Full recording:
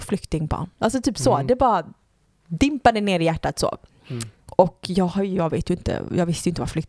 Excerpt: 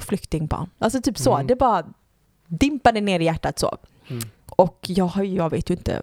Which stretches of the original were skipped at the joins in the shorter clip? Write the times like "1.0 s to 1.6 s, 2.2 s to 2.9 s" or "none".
none